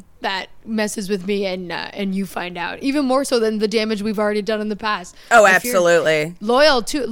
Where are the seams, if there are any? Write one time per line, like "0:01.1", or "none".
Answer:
none